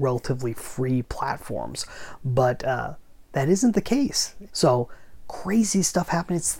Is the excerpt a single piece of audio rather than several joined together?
no; 1 cut; at 4.5 s

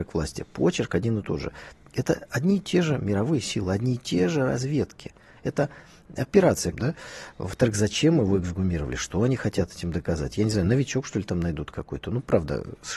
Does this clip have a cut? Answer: yes; 1 cut; at 6.7 s

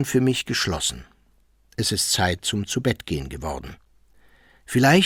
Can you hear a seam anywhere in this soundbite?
no; 0 cuts

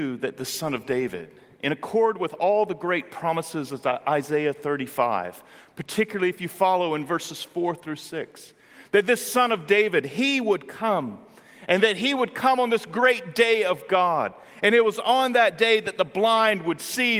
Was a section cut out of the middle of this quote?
no; 0 cuts

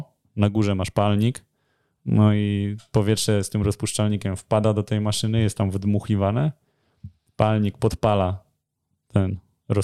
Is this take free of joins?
yes; 0 cuts

